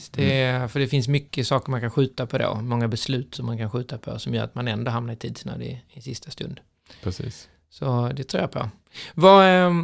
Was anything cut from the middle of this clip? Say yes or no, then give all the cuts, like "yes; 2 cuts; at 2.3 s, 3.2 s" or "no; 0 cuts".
no; 0 cuts